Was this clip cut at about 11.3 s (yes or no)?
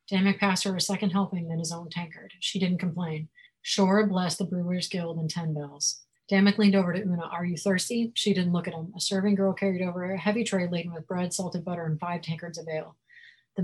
no